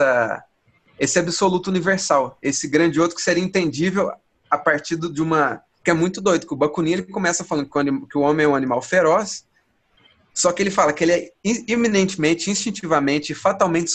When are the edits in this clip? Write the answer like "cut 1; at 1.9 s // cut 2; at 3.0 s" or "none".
cut 1; at 5.8 s